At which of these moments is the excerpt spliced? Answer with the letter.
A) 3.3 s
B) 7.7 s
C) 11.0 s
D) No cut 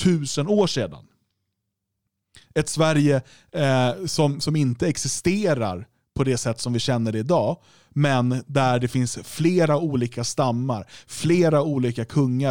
D